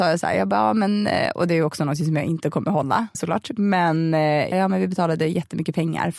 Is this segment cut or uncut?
cut